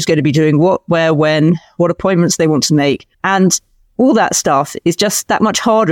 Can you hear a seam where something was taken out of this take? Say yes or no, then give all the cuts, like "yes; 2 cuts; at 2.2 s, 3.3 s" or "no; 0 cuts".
yes; 1 cut; at 3.1 s